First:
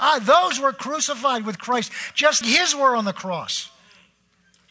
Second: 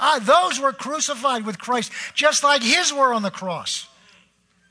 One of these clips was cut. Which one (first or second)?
first